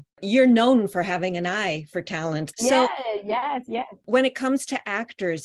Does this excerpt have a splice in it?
yes; 1 cut; at 2.5 s

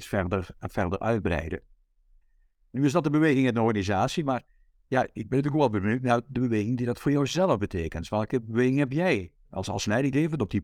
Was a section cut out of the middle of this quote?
no; 0 cuts

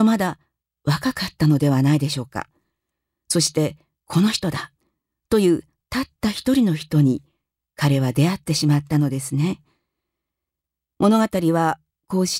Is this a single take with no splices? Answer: yes; 0 cuts

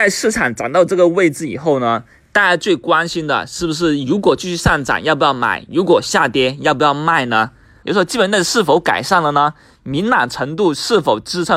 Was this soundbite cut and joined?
yes; 1 cut; at 7.8 s

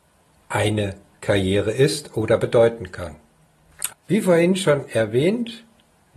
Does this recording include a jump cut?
yes; 1 cut; at 3.9 s

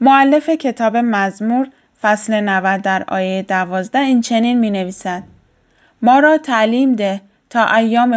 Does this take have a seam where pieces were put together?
no; 0 cuts

